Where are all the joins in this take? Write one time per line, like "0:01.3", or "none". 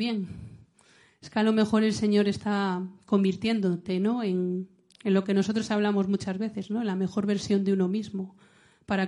none